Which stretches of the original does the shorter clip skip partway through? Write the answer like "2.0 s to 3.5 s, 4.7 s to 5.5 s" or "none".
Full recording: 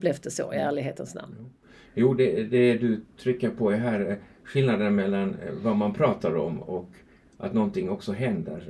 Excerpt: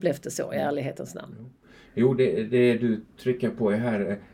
none